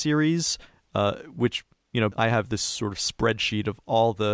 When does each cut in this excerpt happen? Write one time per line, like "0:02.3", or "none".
0:02.1